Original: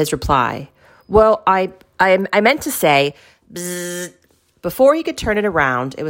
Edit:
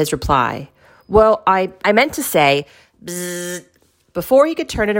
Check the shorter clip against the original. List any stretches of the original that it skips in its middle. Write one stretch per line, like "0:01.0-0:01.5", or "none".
0:01.8-0:02.3